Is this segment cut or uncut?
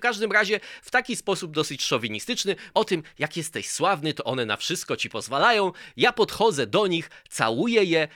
cut